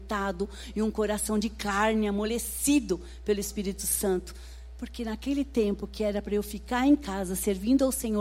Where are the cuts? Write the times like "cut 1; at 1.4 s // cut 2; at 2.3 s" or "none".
none